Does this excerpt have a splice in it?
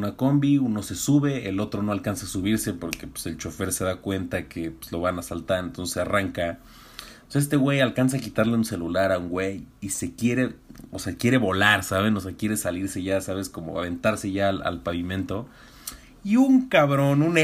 no; 0 cuts

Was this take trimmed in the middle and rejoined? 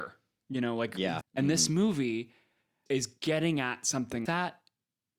yes; 3 cuts; at 1.2 s, 2.9 s, 4.3 s

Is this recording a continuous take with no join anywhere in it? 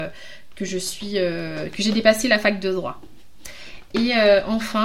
yes; 0 cuts

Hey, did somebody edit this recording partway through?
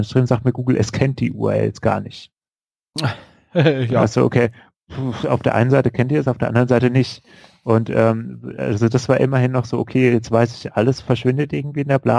yes; 1 cut; at 11.1 s

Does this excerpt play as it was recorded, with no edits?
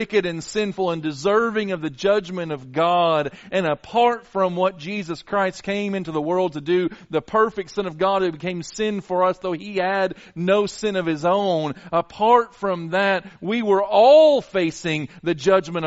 yes; 0 cuts

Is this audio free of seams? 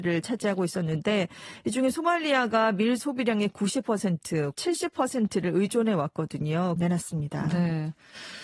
no; 2 cuts; at 4.6 s, 6.8 s

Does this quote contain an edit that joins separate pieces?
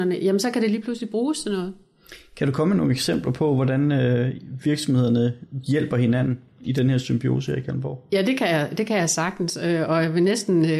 no; 0 cuts

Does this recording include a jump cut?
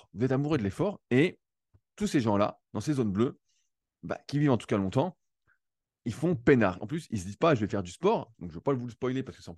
yes; 2 cuts; at 6.8 s, 8.3 s

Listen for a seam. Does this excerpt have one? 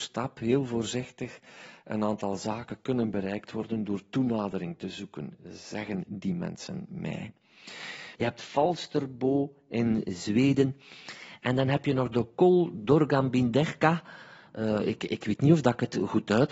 yes; 1 cut; at 8.1 s

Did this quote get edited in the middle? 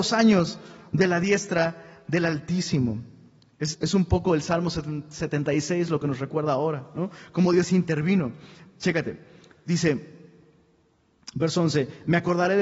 yes; 1 cut; at 3.7 s

